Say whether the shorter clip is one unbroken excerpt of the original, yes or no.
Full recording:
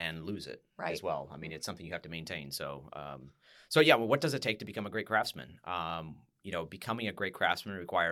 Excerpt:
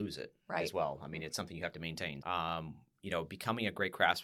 no